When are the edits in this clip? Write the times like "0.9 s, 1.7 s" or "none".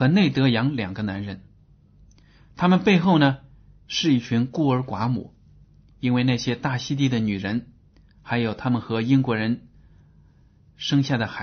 none